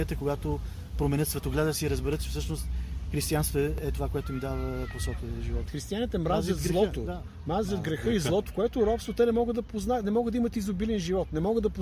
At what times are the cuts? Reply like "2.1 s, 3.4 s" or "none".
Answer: 5.7 s, 8.5 s